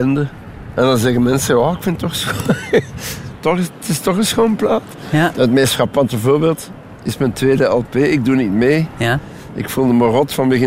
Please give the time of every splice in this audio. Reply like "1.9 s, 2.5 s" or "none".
5.3 s